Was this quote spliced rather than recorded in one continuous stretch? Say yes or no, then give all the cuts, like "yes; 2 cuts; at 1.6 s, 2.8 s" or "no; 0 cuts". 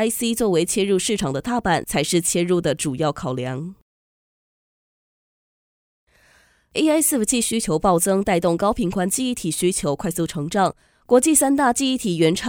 no; 0 cuts